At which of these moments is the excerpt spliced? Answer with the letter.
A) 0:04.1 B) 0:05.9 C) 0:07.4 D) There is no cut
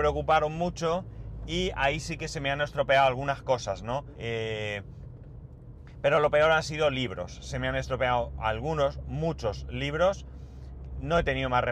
A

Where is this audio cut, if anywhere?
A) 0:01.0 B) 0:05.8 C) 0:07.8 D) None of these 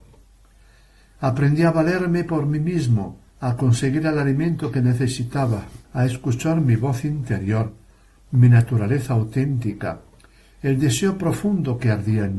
B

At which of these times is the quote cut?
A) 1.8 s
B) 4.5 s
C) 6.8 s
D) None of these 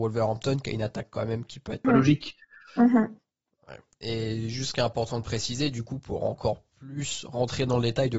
A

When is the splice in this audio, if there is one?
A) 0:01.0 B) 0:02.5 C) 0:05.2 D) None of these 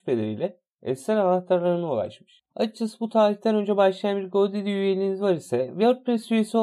B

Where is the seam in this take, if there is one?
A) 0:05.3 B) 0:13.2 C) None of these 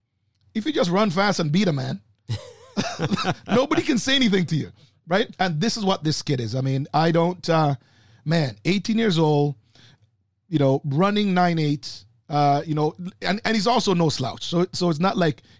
A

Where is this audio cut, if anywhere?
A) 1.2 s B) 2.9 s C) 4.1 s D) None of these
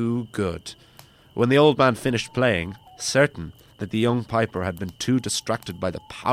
B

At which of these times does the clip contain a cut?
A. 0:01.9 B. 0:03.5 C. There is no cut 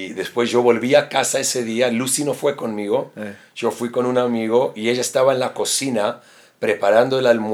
C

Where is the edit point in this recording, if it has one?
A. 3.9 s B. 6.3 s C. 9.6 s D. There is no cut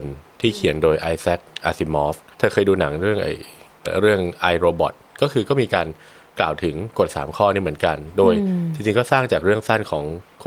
A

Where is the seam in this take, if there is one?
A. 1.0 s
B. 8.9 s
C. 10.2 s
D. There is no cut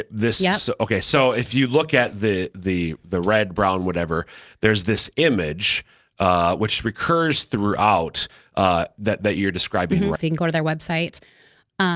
C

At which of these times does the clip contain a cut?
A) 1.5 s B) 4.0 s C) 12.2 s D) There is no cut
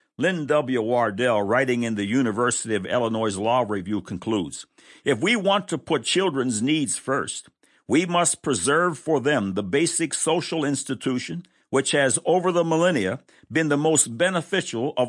D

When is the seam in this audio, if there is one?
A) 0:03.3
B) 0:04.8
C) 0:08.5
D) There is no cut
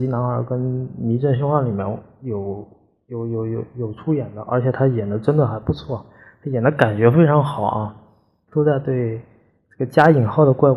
C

